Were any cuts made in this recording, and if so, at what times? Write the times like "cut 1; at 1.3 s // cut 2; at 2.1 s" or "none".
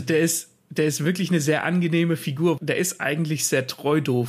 cut 1; at 2.6 s